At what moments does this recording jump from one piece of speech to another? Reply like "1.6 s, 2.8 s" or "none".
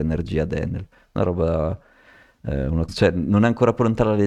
2.9 s